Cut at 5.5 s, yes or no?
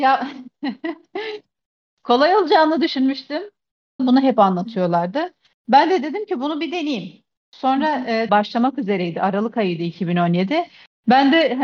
no